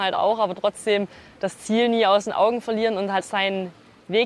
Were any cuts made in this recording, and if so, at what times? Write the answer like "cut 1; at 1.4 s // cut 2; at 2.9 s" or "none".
cut 1; at 3.2 s